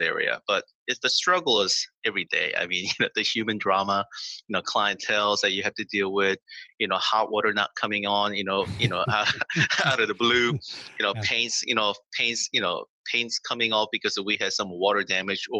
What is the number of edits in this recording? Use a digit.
0